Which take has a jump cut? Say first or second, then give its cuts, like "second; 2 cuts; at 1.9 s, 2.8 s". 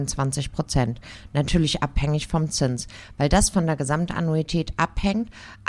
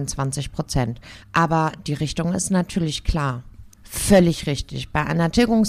second; 2 cuts; at 1.2 s, 3.7 s